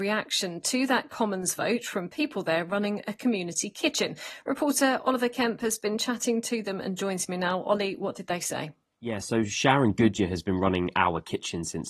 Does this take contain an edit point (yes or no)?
no